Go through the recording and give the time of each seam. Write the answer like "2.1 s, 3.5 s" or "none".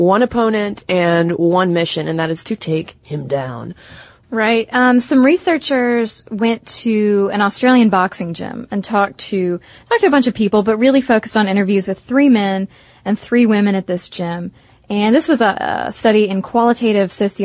4.2 s